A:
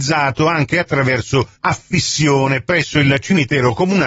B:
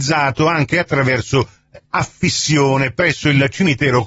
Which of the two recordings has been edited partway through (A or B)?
A